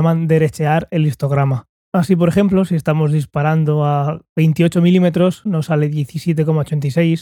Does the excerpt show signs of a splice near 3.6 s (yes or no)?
no